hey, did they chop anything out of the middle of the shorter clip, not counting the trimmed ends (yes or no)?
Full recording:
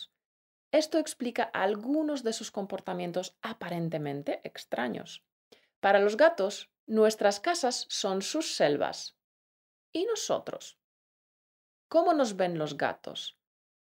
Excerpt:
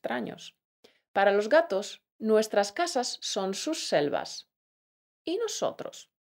no